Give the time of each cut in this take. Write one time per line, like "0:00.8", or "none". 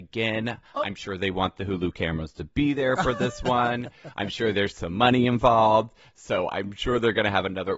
none